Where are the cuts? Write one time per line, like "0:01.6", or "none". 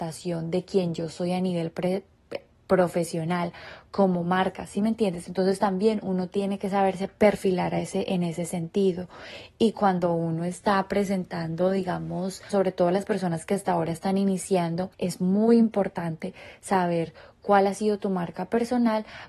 0:12.5
0:14.9